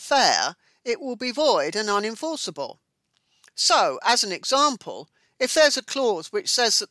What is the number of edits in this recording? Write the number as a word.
zero